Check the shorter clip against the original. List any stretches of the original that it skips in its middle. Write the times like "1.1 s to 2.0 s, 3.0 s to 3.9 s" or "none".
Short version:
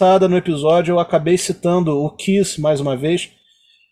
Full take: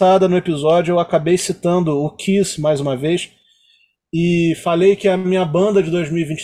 none